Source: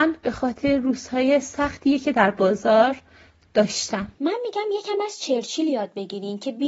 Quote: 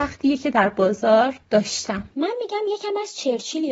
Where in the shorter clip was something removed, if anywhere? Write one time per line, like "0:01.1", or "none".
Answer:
0:01.4

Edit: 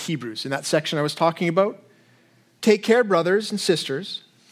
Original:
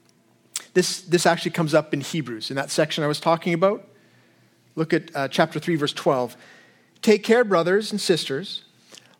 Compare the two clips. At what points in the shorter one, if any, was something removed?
0:02.6

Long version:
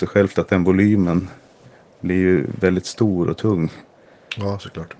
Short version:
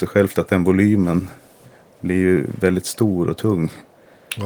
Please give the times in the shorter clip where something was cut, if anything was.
none

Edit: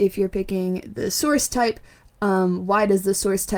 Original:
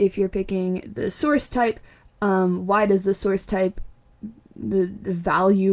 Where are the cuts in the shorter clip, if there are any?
none

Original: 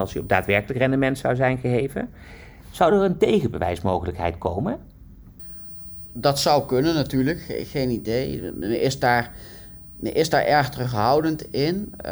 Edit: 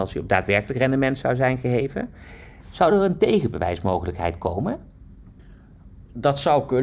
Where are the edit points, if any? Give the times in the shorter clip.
none

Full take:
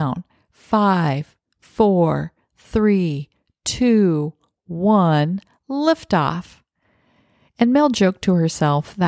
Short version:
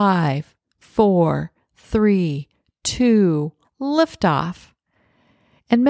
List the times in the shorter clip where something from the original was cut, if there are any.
0:03.6

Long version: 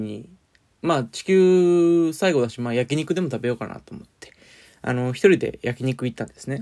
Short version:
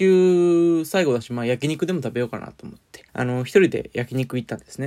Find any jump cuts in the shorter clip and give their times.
0:03.1

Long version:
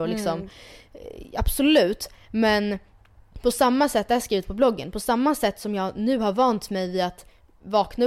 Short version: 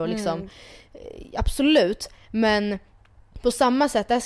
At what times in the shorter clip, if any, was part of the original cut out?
none

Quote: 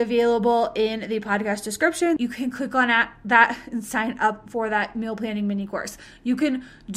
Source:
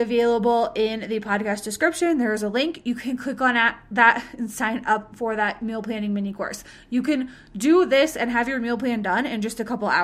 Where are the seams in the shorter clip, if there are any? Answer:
0:02.2

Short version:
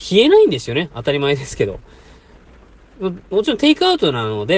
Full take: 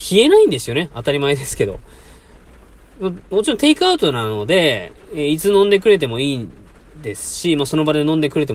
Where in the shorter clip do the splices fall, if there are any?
none

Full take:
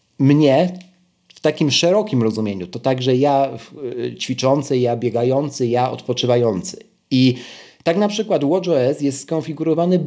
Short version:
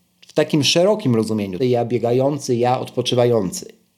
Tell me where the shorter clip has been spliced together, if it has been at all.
0:01.6

